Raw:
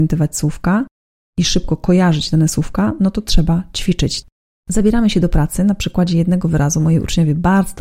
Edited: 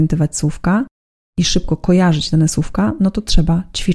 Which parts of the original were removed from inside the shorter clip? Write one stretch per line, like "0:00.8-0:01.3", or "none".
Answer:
none